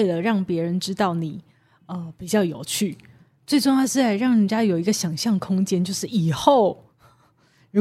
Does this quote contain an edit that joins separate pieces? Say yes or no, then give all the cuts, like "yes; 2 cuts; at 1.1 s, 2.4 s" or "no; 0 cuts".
no; 0 cuts